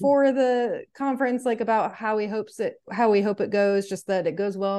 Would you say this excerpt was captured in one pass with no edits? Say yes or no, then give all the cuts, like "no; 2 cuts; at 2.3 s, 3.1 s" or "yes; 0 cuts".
yes; 0 cuts